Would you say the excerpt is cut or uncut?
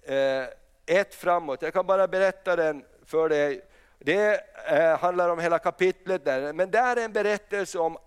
uncut